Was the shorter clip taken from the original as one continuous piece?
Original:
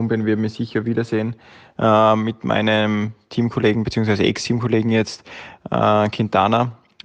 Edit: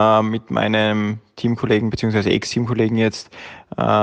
yes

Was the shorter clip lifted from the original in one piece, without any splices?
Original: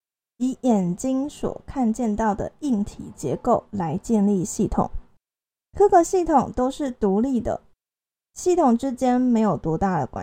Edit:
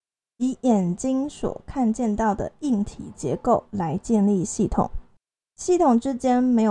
no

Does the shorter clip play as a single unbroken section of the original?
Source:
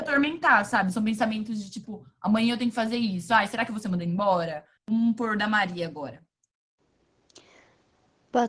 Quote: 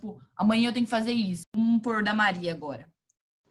no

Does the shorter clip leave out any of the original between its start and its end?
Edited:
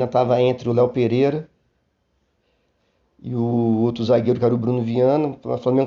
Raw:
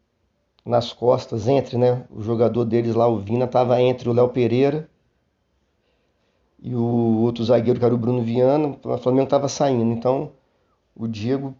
no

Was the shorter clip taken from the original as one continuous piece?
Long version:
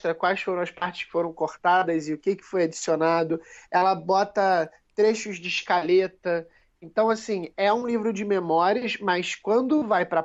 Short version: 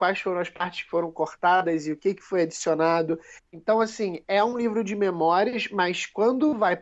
no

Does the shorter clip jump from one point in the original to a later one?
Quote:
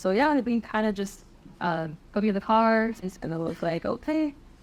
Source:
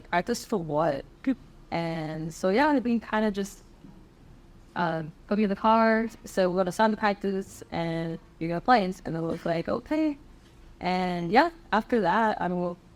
yes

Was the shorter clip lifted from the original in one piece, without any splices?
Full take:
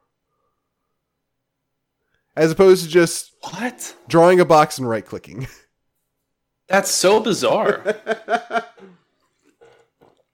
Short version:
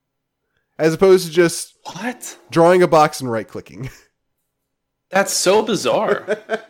yes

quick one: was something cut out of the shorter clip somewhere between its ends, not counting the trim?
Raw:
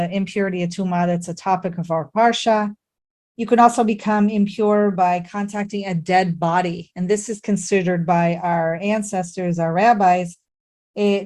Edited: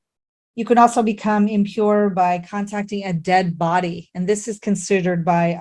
no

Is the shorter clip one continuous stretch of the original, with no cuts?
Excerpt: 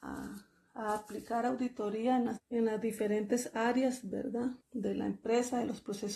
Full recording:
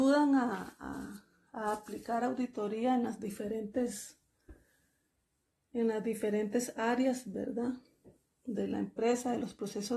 no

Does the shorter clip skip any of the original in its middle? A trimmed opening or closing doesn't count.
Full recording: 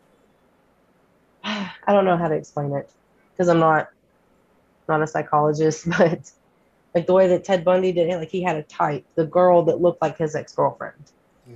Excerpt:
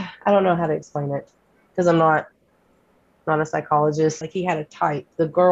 yes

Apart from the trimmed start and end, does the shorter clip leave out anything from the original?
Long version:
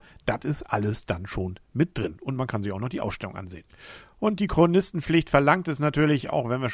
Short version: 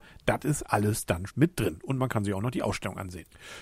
yes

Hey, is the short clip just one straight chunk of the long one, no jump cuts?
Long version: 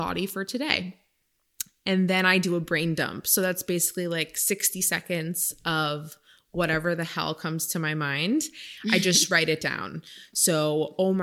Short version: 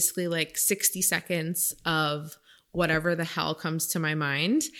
yes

